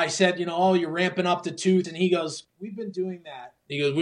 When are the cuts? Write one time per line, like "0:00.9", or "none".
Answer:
0:01.8